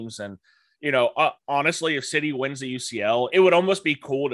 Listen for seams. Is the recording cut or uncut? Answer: cut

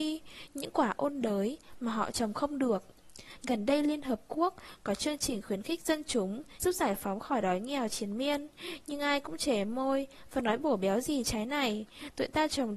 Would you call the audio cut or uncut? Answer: cut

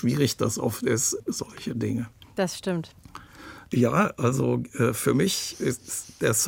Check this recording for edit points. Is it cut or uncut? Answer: cut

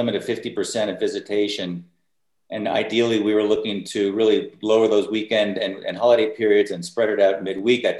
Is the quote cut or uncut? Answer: uncut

